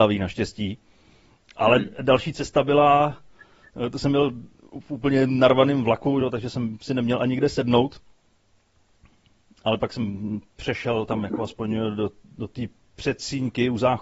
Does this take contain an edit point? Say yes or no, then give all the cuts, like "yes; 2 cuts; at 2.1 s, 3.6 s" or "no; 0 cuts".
no; 0 cuts